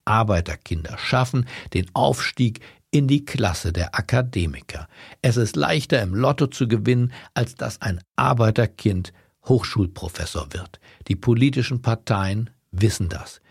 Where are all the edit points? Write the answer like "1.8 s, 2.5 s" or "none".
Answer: none